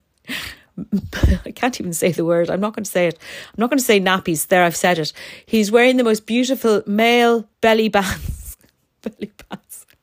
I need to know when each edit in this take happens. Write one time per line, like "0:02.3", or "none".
0:07.5